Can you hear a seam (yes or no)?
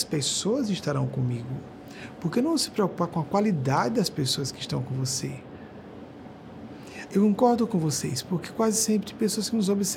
yes